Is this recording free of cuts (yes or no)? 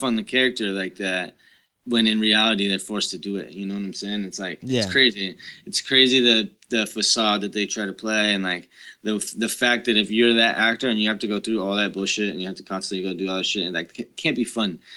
yes